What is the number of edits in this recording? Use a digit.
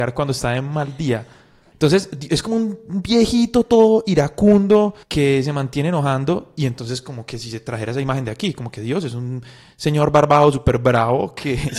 2